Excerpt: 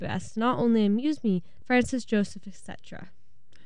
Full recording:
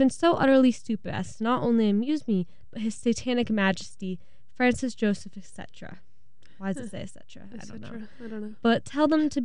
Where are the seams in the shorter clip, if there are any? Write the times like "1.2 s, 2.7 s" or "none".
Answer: 1.6 s